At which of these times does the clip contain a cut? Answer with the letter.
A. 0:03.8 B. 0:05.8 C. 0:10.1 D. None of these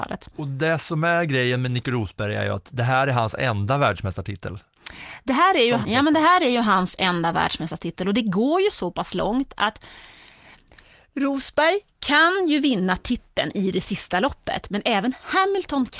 B